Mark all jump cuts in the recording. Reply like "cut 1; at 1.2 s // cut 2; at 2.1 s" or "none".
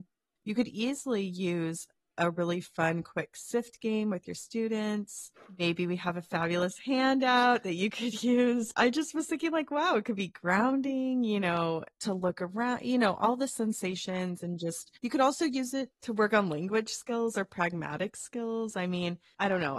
none